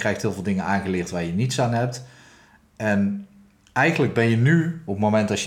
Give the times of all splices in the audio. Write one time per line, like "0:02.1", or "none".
none